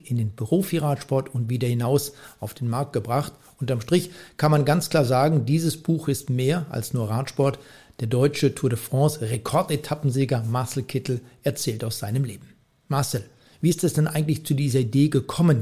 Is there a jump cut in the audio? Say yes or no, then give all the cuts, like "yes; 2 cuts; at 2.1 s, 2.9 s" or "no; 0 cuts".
no; 0 cuts